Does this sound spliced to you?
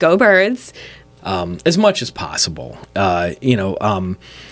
yes; 1 cut; at 1.2 s

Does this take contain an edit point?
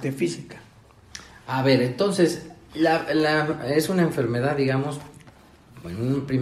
no; 0 cuts

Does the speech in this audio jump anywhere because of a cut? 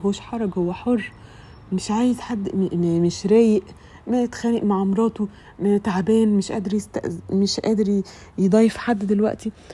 no; 0 cuts

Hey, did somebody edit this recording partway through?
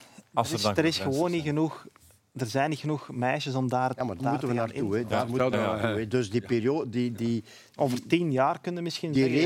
yes; 1 cut; at 4.2 s

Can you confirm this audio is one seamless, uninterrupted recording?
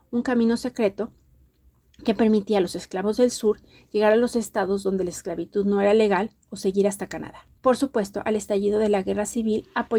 no; 1 cut; at 7.6 s

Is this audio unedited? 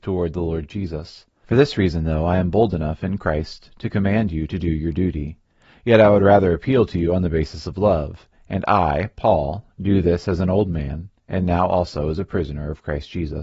no; 1 cut; at 1.4 s

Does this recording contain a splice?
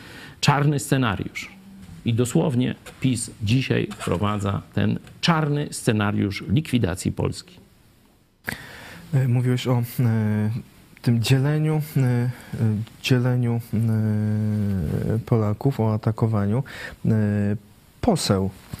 no; 0 cuts

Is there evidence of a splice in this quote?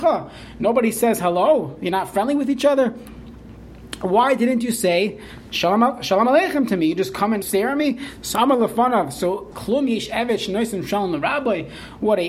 yes; 2 cuts; at 7.4 s, 9.5 s

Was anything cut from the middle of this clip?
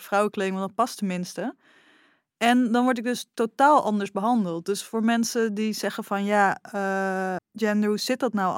yes; 1 cut; at 7.4 s

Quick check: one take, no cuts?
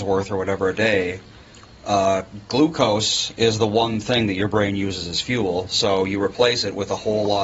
yes; 0 cuts

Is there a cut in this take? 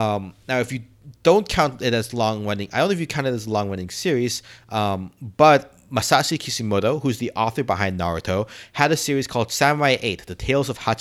no; 0 cuts

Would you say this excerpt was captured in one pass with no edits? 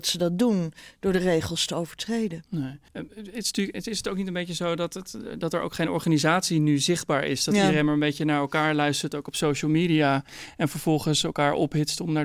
no; 1 cut; at 2.9 s

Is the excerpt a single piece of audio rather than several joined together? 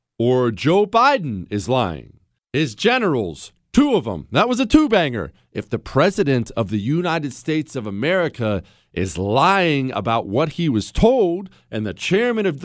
no; 2 cuts; at 2.4 s, 5.5 s

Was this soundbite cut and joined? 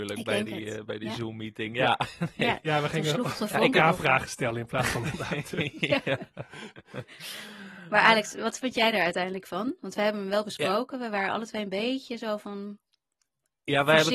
no; 0 cuts

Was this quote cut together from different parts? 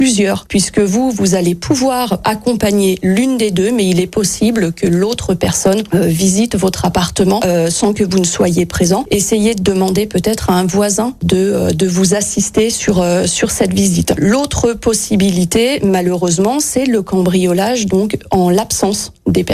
no; 0 cuts

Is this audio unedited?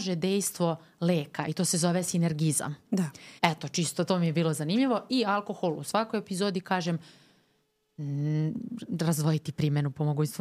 no; 1 cut; at 3.4 s

